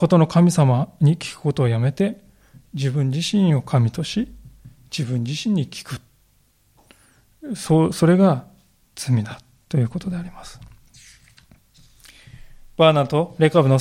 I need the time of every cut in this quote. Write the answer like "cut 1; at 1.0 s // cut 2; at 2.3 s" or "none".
none